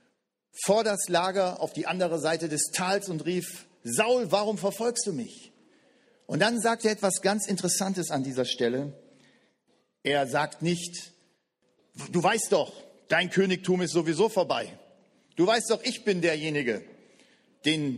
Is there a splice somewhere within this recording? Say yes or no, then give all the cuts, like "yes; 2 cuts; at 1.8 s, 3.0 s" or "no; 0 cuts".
no; 0 cuts